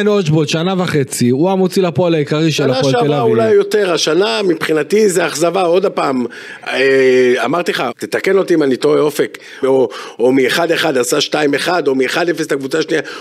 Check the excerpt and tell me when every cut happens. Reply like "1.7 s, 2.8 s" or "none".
7.9 s, 9.6 s

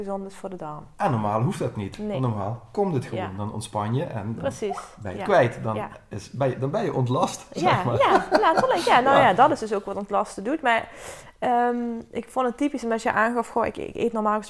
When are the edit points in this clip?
none

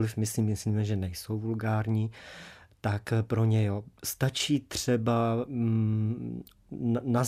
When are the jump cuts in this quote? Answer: none

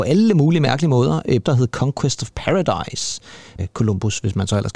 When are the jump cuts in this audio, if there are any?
1.4 s, 3.6 s

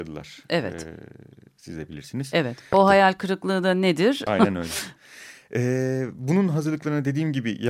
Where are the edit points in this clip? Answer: 2.7 s, 4.3 s

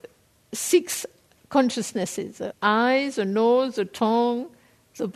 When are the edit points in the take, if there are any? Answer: 2.5 s

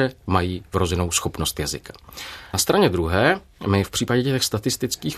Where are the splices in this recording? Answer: none

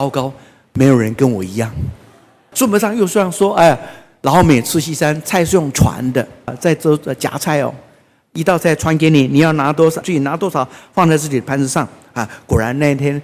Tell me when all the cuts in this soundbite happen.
2.5 s, 6.5 s, 10.0 s

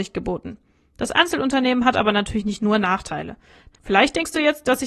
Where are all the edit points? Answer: 3.7 s

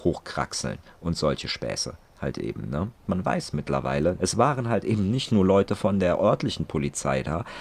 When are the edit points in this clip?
3.1 s, 4.2 s

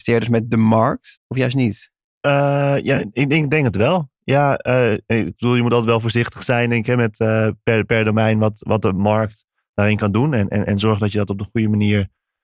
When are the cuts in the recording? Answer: 1.2 s

